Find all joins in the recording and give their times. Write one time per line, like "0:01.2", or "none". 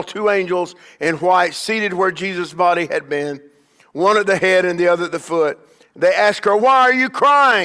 0:06.6